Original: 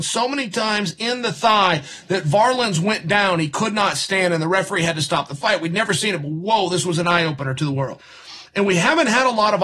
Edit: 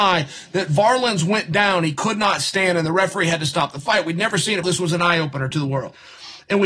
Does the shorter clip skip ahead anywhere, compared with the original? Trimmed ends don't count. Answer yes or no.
yes